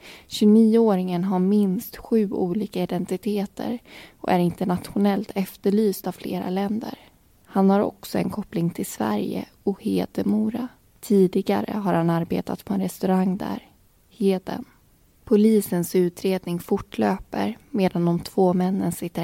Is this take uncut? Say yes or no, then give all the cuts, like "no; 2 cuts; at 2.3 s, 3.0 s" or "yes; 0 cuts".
yes; 0 cuts